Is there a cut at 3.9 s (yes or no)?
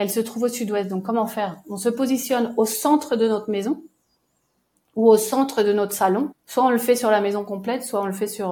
no